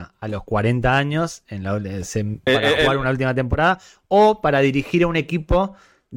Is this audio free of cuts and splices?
no; 1 cut; at 2.5 s

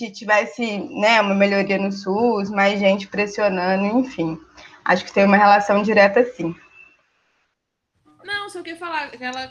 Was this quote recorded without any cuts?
yes; 0 cuts

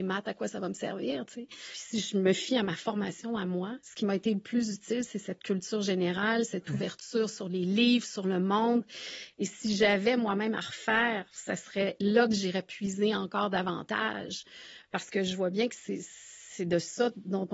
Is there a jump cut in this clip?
no; 0 cuts

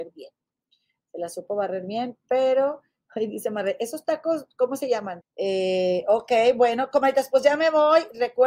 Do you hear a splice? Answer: yes; 1 cut; at 5.2 s

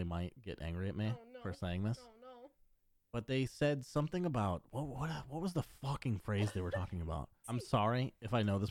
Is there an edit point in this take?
yes; 1 cut; at 7.4 s

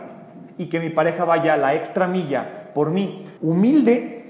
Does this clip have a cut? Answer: yes; 1 cut; at 3.4 s

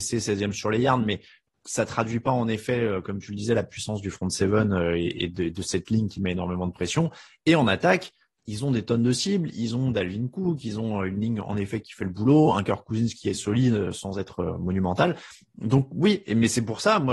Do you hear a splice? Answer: no; 0 cuts

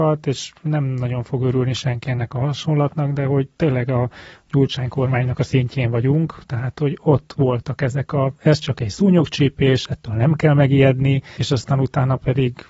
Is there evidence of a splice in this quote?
no; 0 cuts

